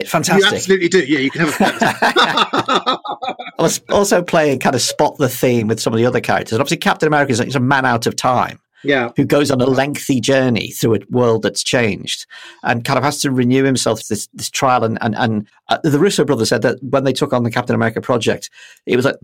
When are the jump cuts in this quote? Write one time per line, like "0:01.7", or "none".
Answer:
0:14.0
0:16.5